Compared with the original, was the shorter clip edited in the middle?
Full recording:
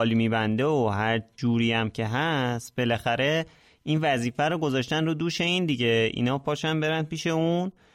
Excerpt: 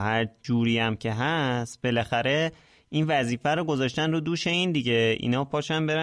no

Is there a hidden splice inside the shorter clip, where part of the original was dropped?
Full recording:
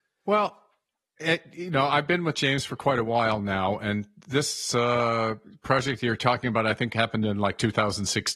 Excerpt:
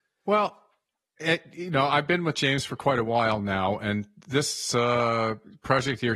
no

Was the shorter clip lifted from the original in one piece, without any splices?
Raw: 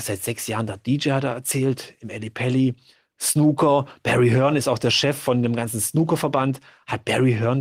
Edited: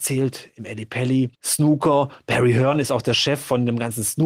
no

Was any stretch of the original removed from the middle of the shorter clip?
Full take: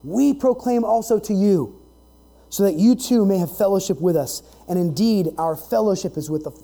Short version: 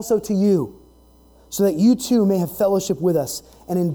no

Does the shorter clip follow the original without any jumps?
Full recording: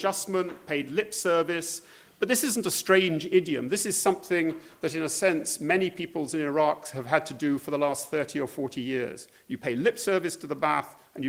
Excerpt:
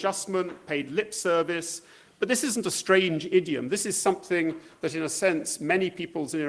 yes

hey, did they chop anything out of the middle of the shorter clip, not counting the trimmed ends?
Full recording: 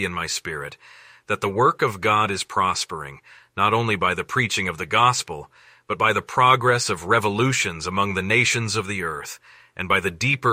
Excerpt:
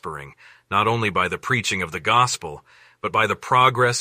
no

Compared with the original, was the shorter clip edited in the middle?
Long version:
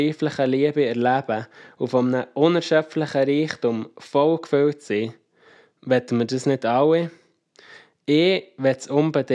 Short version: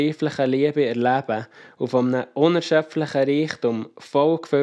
no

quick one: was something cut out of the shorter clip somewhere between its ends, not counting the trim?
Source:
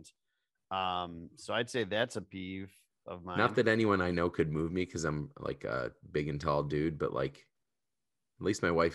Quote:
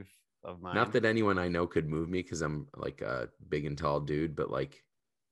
no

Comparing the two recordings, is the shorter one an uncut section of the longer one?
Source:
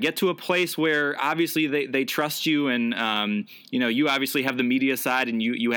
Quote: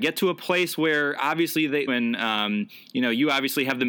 no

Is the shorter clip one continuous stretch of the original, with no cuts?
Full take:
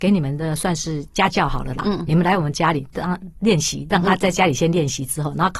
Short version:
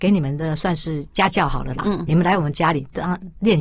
yes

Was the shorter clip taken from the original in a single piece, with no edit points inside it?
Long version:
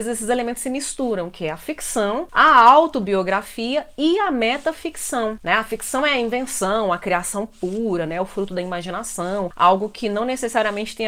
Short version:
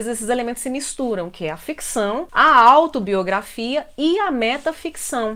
yes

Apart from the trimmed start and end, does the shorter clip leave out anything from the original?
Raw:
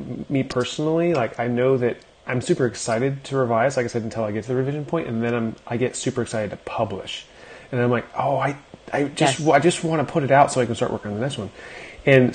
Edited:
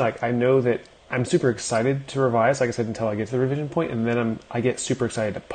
no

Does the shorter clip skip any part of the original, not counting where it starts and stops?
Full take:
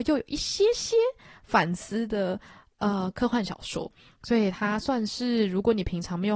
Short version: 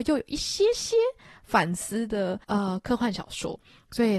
yes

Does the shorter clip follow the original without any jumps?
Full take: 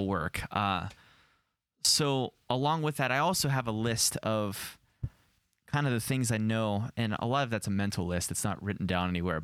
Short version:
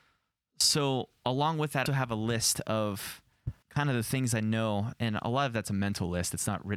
no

